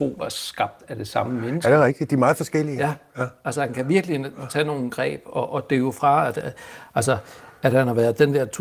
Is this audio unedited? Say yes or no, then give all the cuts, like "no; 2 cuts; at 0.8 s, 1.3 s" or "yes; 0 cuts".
yes; 0 cuts